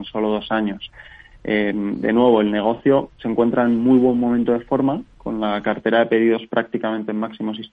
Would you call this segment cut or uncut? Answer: uncut